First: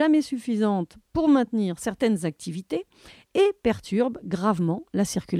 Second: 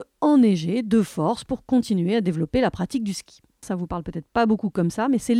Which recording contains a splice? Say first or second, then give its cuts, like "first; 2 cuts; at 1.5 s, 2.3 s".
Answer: second; 1 cut; at 3.6 s